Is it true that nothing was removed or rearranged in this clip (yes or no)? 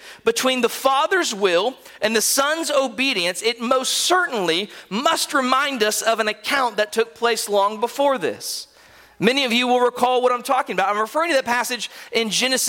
yes